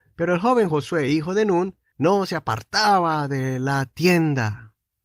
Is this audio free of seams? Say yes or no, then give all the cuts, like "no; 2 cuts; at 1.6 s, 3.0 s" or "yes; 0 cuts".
no; 1 cut; at 1.9 s